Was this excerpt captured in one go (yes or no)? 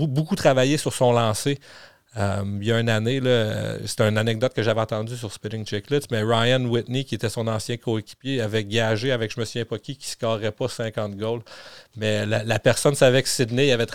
yes